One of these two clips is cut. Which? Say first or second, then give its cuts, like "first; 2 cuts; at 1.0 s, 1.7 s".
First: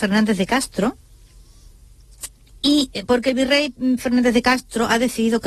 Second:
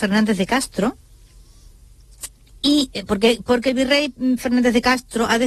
first; 1 cut; at 3.1 s